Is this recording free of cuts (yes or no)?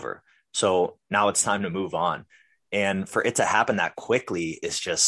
yes